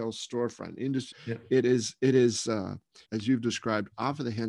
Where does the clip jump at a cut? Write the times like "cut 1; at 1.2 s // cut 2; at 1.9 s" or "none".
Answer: cut 1; at 1.1 s // cut 2; at 3.1 s